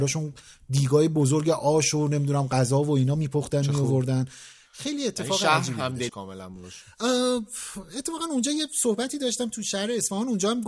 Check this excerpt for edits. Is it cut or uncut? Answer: cut